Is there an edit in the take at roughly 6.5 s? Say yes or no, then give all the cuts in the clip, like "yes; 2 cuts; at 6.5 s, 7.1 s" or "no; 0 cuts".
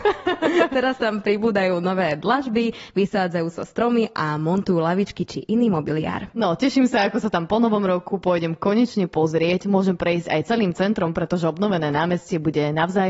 no; 0 cuts